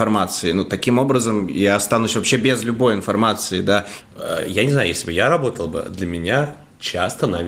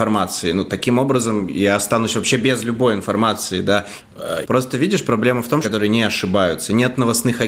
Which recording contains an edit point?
second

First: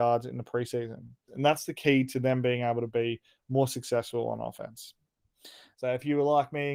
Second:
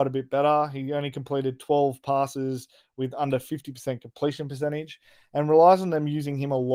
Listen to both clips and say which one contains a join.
first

